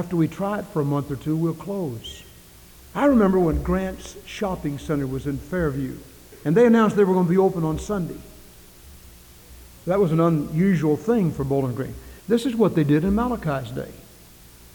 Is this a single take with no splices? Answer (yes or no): no